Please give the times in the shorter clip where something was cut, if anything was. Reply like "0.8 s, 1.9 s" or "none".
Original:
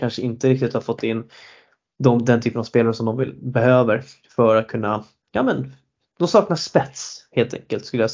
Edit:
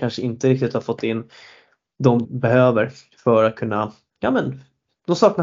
2.2 s